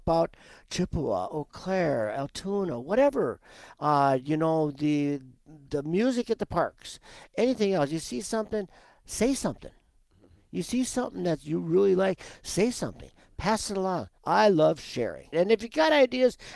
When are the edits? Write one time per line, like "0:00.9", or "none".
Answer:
0:14.2
0:15.3